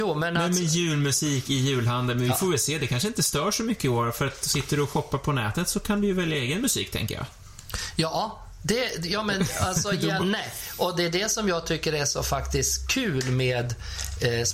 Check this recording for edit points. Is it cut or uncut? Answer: cut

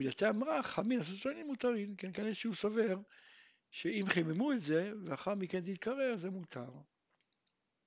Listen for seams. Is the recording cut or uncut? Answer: uncut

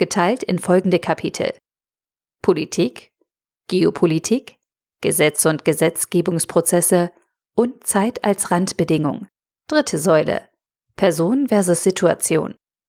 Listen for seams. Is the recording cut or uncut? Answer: cut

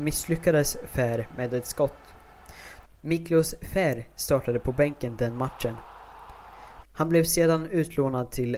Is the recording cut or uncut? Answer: cut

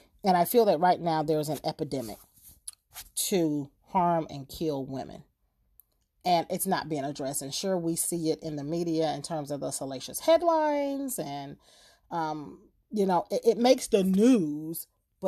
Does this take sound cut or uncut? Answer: uncut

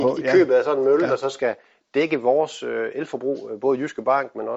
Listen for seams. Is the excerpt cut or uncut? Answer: uncut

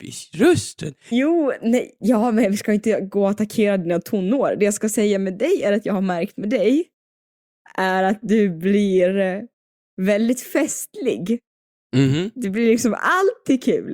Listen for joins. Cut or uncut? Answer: cut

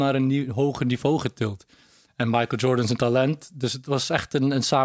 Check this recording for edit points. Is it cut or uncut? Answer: uncut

